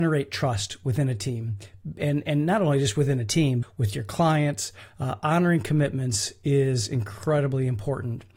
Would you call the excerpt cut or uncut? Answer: cut